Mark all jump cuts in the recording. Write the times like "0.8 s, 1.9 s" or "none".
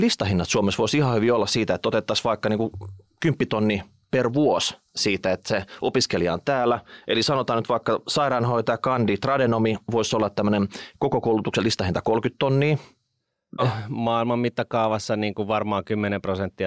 13.6 s